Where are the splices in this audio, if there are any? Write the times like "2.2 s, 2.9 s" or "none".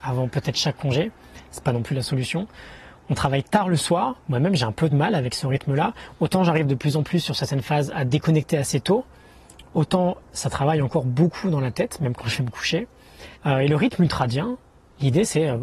4.2 s, 13.4 s